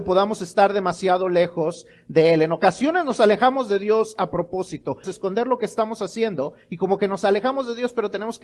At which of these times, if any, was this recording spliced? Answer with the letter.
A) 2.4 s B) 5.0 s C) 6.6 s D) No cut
B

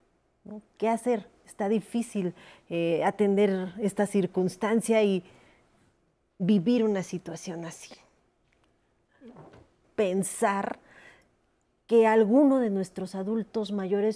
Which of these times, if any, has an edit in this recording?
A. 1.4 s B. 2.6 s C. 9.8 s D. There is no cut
C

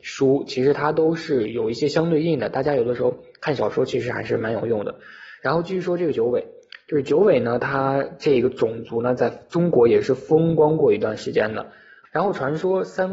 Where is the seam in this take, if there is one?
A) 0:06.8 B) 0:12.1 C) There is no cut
B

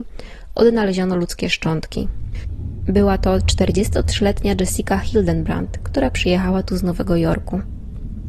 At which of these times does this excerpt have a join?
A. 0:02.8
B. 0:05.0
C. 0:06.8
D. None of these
A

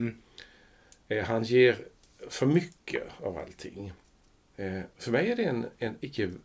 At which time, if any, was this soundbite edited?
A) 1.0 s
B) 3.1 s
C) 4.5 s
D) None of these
C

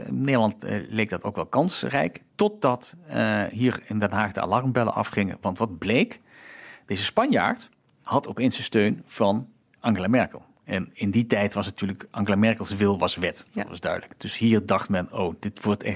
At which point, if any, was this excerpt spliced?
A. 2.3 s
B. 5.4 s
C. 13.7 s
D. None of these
A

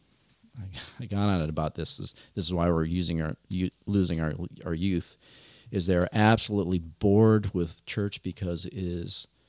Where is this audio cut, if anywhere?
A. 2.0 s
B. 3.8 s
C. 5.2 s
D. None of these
D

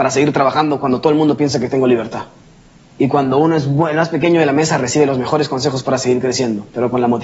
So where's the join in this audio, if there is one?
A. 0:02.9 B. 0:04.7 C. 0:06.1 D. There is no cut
A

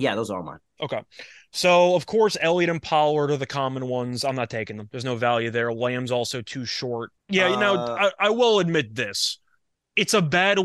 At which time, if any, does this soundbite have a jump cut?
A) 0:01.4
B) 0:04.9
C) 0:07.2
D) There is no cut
C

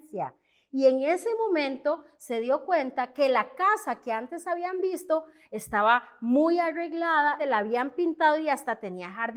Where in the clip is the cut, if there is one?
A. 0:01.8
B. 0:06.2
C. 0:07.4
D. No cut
C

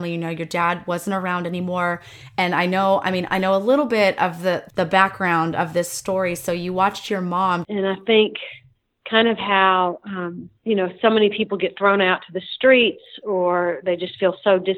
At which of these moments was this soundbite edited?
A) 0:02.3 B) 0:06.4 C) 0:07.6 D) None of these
C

